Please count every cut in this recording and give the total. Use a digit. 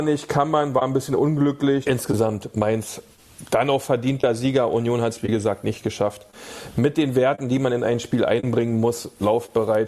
1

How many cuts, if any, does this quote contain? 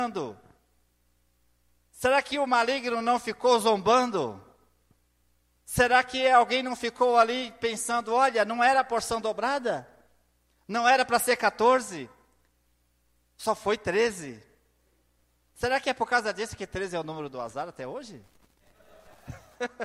0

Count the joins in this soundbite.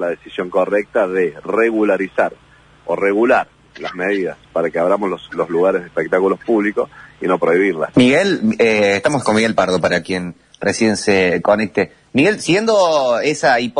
1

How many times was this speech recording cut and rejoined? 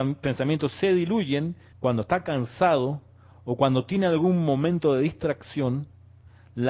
1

